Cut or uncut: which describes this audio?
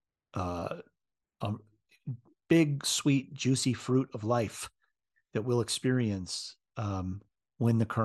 uncut